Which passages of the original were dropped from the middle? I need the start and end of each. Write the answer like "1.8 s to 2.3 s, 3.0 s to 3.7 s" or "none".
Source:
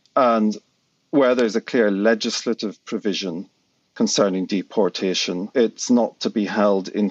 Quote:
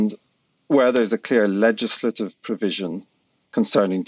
none